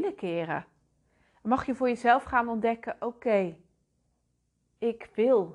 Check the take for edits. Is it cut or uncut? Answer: uncut